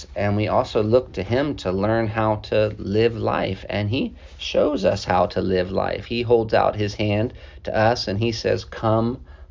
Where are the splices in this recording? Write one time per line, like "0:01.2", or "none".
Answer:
none